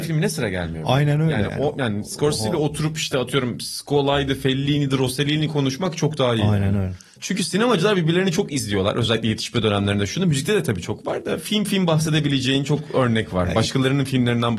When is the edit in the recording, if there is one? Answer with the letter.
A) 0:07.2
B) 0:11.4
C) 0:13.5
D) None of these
A